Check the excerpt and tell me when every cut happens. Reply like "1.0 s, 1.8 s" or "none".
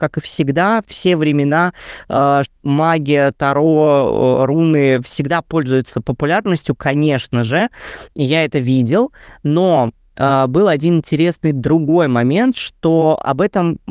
2.5 s